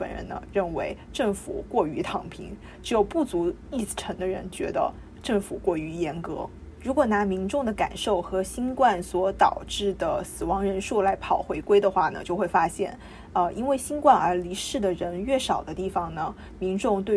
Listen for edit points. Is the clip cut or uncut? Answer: uncut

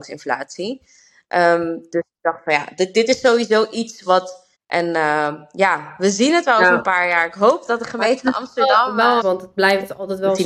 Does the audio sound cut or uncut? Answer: cut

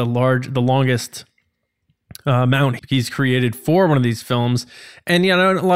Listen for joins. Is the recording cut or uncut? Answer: cut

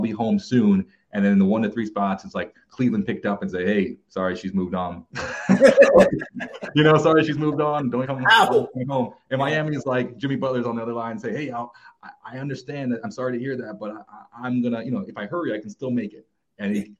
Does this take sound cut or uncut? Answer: cut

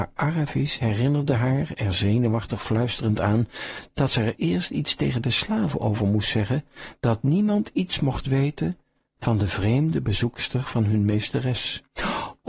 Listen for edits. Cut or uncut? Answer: uncut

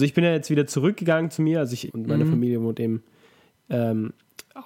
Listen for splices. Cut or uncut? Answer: cut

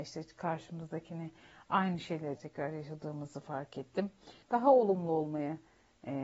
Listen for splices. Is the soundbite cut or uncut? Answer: cut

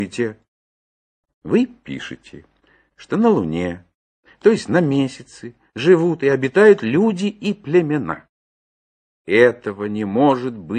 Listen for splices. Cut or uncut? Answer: cut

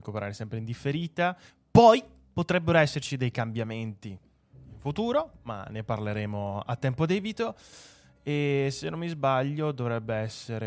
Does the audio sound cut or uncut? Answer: uncut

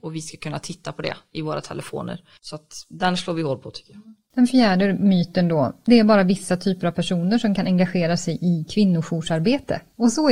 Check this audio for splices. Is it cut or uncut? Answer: cut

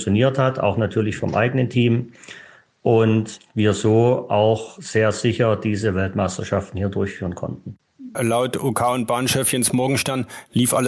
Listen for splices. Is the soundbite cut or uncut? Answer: cut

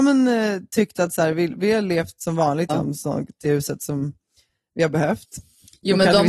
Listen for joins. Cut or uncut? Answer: cut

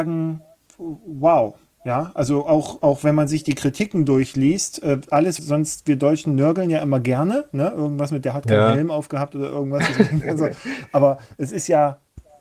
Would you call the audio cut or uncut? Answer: cut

